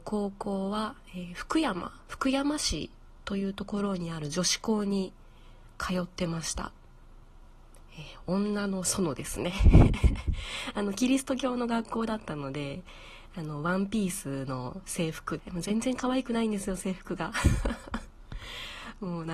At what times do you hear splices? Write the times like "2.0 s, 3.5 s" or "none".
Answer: 15.4 s